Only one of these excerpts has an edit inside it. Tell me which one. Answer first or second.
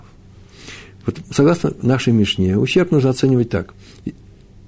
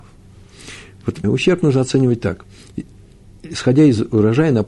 second